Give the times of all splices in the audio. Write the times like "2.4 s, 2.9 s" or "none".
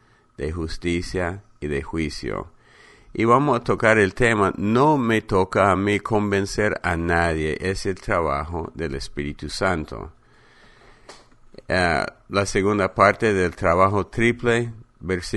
none